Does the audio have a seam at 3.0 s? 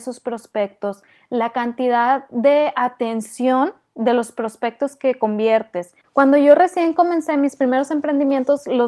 no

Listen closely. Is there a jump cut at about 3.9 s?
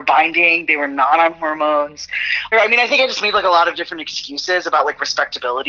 no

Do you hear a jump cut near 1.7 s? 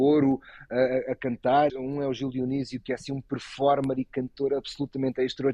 yes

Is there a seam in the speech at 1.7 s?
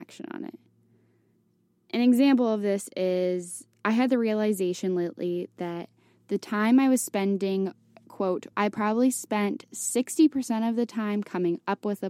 no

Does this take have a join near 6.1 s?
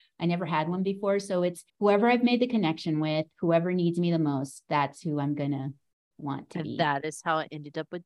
no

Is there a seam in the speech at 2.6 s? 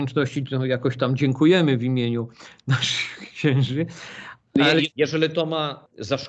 no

